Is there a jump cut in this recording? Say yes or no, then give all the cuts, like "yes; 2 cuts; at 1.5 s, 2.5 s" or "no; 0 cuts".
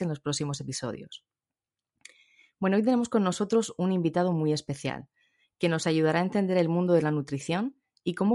no; 0 cuts